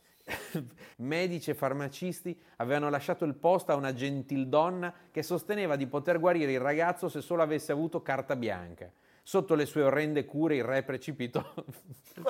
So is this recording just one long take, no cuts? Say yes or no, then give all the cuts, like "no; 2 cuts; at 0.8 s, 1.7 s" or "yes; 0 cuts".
no; 1 cut; at 0.9 s